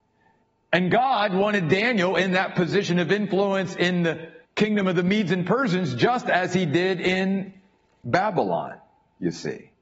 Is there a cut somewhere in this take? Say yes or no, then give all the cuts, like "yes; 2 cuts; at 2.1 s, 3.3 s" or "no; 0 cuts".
yes; 1 cut; at 4.4 s